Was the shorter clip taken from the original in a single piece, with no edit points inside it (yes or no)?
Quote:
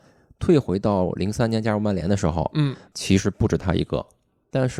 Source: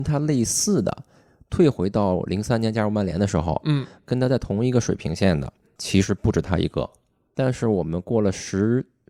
no